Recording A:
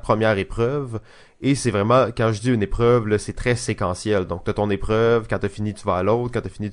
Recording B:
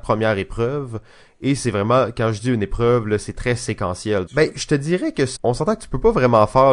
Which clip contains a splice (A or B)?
B